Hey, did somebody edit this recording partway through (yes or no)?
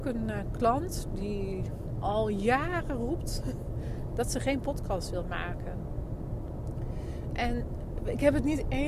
no